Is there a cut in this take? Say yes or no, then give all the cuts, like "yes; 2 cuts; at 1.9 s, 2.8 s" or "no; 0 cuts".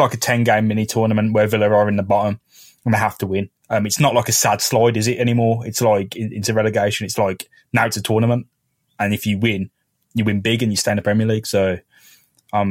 no; 0 cuts